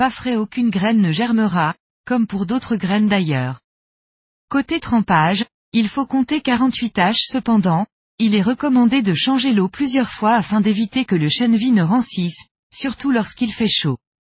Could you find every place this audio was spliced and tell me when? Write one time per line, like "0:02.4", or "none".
none